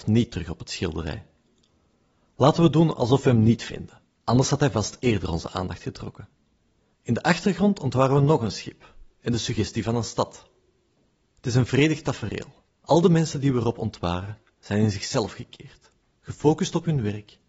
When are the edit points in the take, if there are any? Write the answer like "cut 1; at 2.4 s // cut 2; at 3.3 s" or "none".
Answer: cut 1; at 6.9 s // cut 2; at 12.7 s

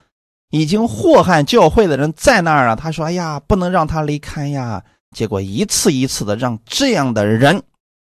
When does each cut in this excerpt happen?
cut 1; at 5.1 s

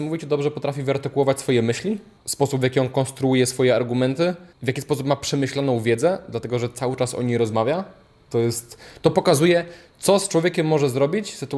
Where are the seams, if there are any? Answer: cut 1; at 2.2 s // cut 2; at 4.5 s

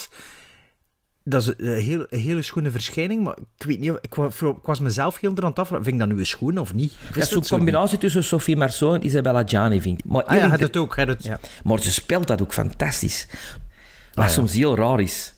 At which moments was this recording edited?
cut 1; at 10.0 s // cut 2; at 11.2 s // cut 3; at 13.7 s

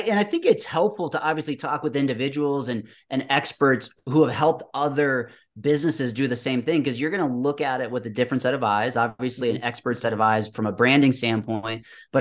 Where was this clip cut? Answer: none

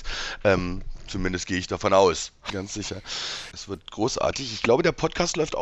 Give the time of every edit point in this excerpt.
cut 1; at 2.5 s // cut 2; at 3.5 s

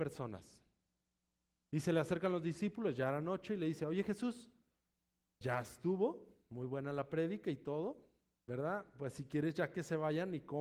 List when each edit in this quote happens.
cut 1; at 5.4 s // cut 2; at 8.4 s

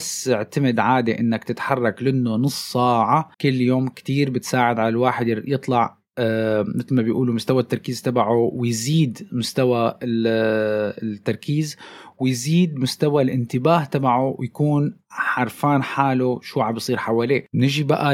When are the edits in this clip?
cut 1; at 3.3 s

